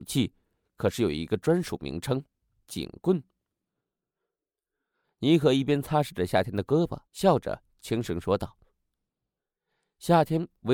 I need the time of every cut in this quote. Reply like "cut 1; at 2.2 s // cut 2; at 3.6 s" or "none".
cut 1; at 5.0 s // cut 2; at 7.1 s